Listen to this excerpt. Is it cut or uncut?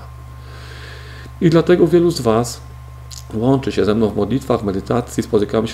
uncut